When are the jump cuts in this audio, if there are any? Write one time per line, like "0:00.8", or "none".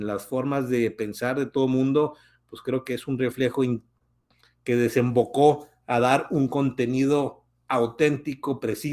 none